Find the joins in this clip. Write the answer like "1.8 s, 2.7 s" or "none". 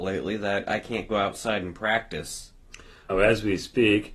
3.1 s